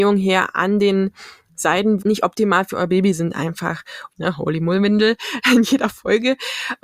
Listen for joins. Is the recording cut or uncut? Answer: cut